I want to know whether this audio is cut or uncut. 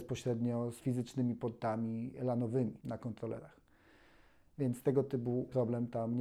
uncut